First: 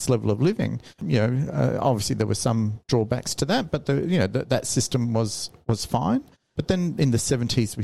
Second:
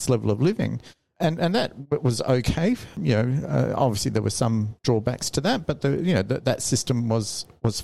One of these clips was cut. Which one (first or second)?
first